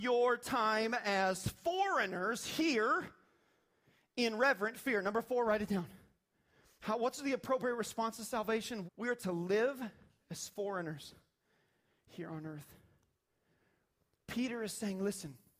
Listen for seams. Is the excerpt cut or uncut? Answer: cut